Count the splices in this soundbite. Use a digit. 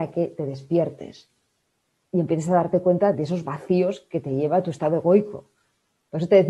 1